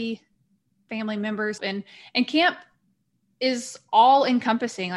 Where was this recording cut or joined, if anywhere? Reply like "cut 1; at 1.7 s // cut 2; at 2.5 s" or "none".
cut 1; at 1.6 s